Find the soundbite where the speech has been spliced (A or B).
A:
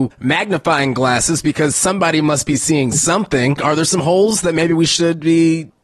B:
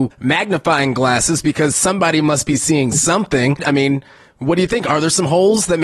A